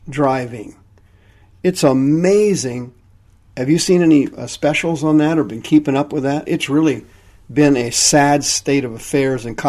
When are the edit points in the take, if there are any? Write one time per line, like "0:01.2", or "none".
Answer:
none

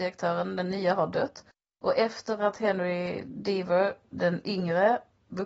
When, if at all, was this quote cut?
0:04.1

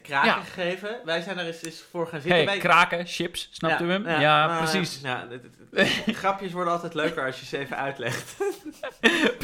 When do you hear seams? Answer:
none

